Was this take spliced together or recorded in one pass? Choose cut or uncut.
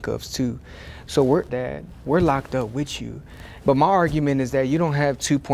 cut